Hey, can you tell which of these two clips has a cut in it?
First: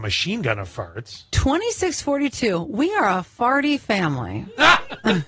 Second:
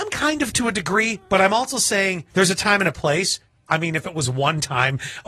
second; 2 cuts; at 2.3 s, 3.7 s

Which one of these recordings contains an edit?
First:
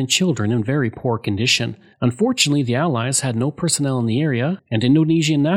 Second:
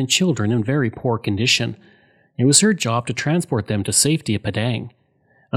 first; 1 cut; at 1.9 s

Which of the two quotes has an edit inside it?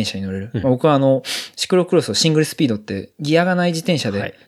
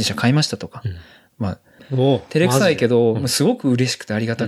second; 1 cut; at 1.8 s

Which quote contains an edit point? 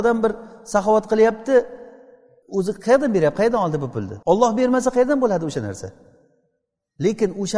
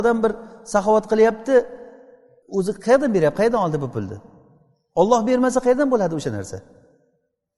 first; 1 cut; at 4.2 s

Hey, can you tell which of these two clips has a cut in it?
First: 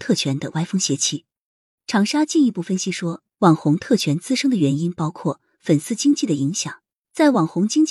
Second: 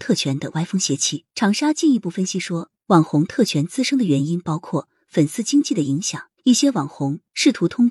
second; 2 cuts; at 1.3 s, 6.4 s

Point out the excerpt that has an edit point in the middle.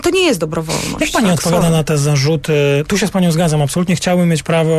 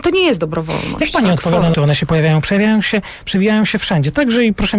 second; 1 cut; at 1.7 s

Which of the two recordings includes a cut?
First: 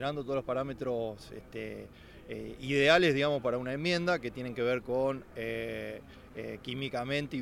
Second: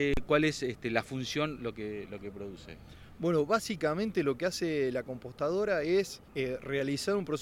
second; 1 cut; at 6.3 s

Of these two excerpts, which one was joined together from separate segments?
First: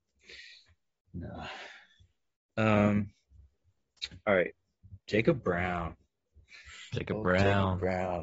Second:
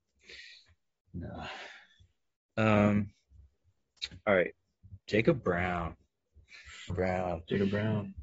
second; 1 cut; at 6.9 s

